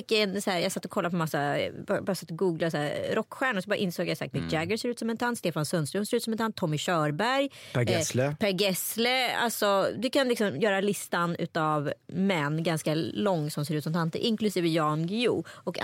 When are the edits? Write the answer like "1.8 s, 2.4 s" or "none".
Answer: 4.3 s